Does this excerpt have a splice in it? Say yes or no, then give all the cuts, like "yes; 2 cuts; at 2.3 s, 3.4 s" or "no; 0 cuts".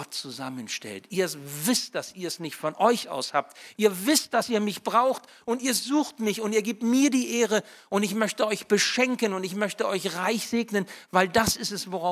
no; 0 cuts